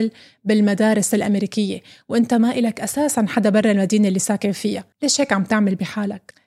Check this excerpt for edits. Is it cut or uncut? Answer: cut